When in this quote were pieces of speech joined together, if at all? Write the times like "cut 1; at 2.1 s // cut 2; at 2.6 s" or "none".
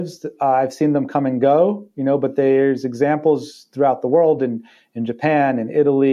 none

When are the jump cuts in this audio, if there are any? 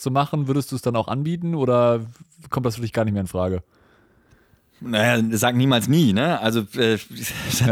none

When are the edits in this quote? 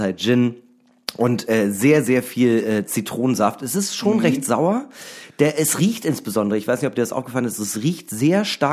none

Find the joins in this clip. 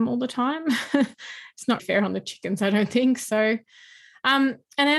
cut 1; at 1.8 s

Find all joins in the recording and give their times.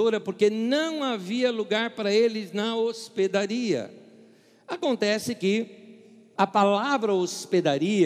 cut 1; at 6.4 s

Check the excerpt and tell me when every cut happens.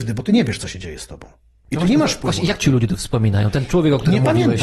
none

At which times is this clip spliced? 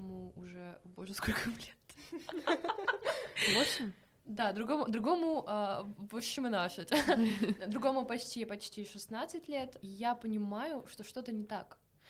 none

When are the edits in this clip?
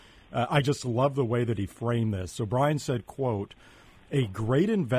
cut 1; at 2.3 s

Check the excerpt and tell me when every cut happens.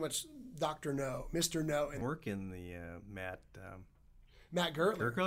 cut 1; at 2.0 s

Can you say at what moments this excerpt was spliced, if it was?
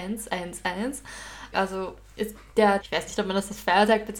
cut 1; at 1.5 s // cut 2; at 2.8 s

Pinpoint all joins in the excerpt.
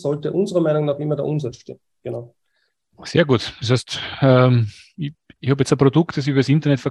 none

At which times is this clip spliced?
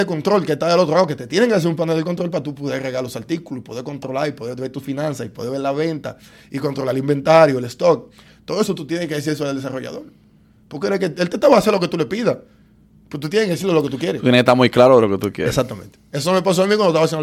none

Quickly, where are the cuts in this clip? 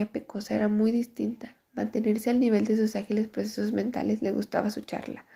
cut 1; at 1.6 s

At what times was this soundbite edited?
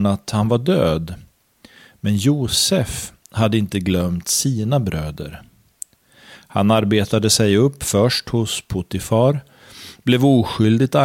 none

